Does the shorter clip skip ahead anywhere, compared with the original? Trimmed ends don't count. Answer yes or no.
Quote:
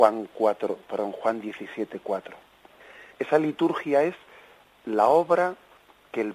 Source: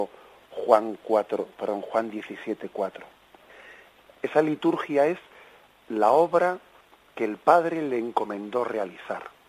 yes